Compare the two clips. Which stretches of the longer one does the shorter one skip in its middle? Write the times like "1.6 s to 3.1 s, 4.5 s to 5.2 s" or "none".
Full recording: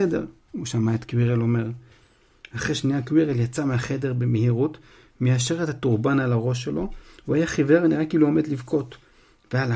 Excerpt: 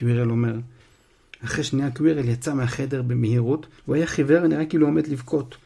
4.9 s to 7.2 s